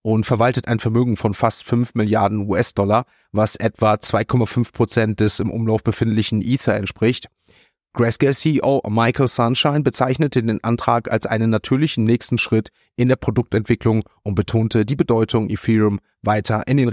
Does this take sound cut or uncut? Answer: uncut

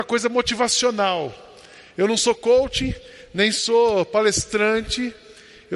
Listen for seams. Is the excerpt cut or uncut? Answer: uncut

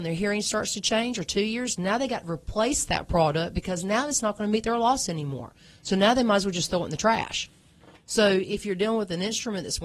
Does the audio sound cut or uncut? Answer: uncut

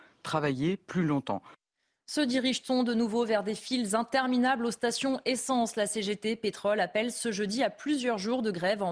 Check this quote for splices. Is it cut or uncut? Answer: uncut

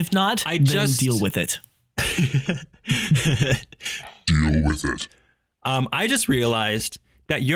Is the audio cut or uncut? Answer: uncut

